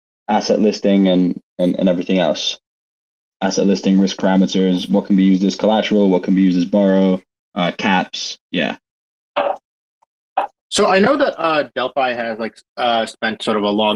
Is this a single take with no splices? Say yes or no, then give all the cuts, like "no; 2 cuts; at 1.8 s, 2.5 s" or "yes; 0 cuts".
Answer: yes; 0 cuts